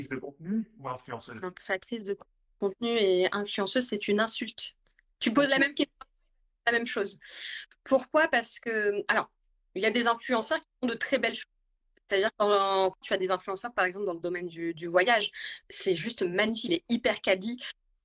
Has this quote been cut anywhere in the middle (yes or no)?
yes